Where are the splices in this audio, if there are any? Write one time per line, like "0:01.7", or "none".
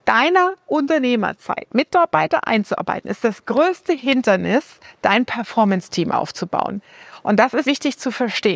0:07.6